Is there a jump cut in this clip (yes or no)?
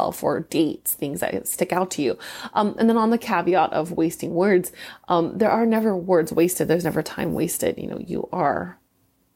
no